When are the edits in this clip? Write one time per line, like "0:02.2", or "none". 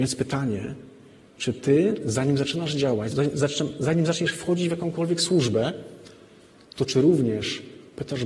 0:03.1